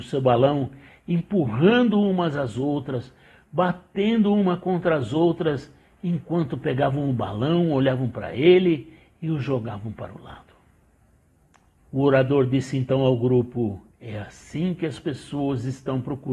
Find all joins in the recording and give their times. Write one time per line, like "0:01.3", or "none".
0:03.4
0:11.8
0:13.9

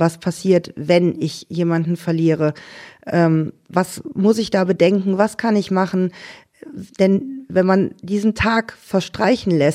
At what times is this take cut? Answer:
none

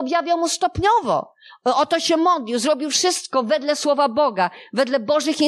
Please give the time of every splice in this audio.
none

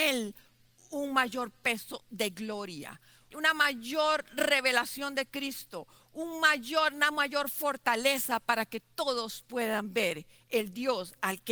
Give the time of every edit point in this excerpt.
0:03.3

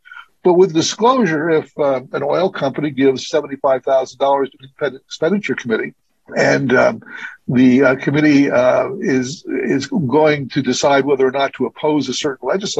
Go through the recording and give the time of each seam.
none

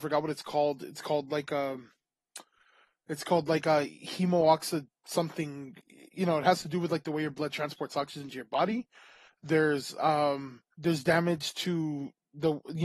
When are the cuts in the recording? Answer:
0:09.3
0:10.7

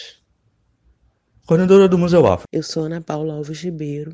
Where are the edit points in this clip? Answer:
0:02.4

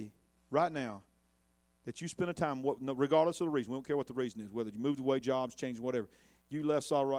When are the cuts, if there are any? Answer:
none

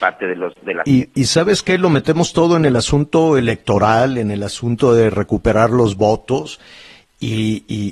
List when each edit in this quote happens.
0:01.1

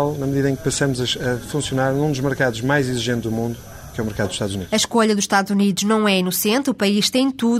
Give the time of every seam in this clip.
none

